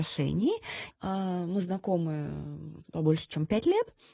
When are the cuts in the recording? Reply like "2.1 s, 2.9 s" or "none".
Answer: 0.9 s, 2.8 s